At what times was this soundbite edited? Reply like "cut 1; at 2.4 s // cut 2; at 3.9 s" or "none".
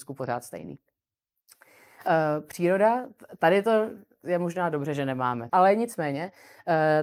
cut 1; at 5.5 s

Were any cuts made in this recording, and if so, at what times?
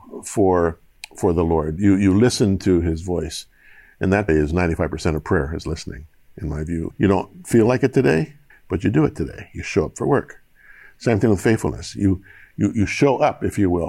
cut 1; at 4.3 s // cut 2; at 6.9 s // cut 3; at 8.5 s

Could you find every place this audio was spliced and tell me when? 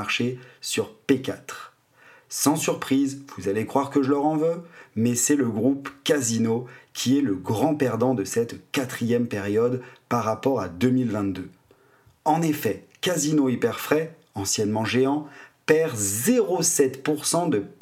none

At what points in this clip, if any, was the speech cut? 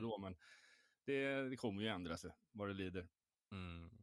none

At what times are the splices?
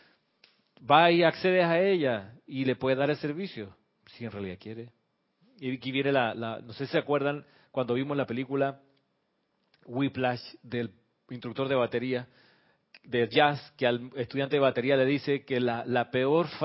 cut 1; at 5.4 s

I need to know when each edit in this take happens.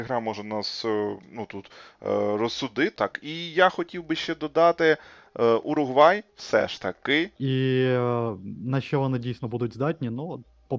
cut 1; at 2.9 s // cut 2; at 7.4 s

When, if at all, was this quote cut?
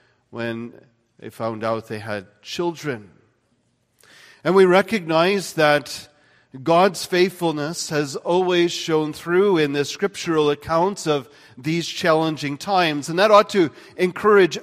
none

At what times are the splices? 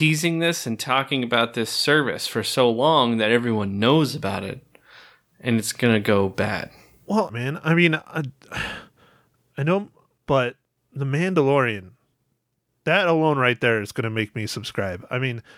cut 1; at 7.3 s // cut 2; at 10.2 s

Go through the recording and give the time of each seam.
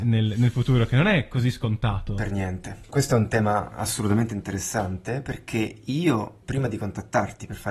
none

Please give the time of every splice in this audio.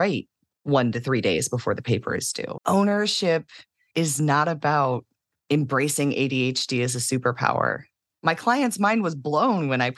cut 1; at 2.6 s // cut 2; at 8.1 s

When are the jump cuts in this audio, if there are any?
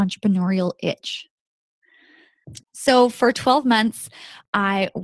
cut 1; at 2.6 s

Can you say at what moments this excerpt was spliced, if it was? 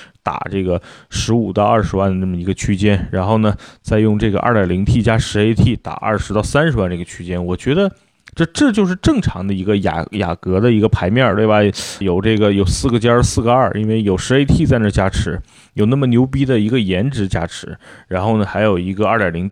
cut 1; at 12.0 s

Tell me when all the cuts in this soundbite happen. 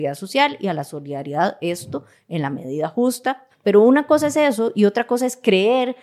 cut 1; at 3.5 s

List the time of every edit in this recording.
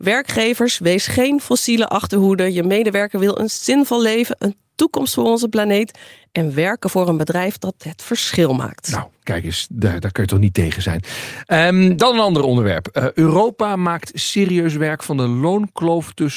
none

